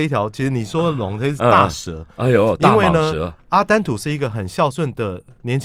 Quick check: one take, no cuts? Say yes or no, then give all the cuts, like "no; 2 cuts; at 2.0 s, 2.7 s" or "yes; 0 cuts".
yes; 0 cuts